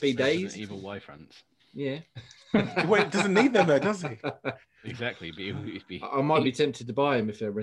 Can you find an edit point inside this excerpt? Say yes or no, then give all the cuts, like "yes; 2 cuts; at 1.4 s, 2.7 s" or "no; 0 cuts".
no; 0 cuts